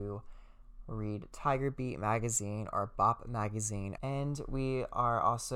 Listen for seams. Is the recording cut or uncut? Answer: cut